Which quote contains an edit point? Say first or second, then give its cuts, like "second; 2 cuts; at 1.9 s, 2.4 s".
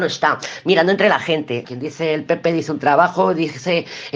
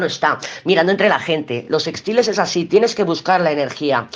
first; 1 cut; at 1.6 s